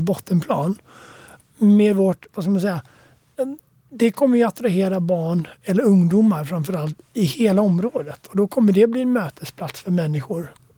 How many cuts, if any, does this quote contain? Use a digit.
0